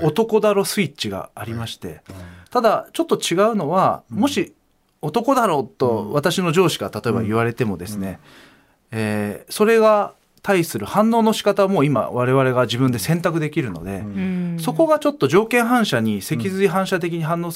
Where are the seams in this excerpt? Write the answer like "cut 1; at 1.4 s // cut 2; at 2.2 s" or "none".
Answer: cut 1; at 2.4 s